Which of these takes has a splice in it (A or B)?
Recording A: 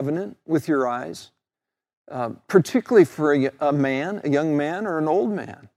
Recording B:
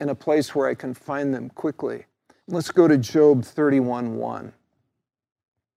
B